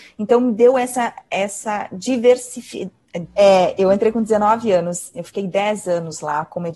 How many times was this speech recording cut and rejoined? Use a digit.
2